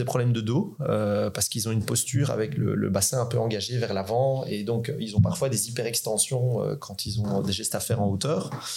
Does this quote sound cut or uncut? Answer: uncut